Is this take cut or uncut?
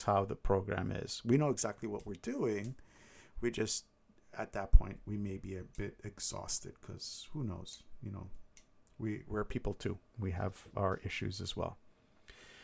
uncut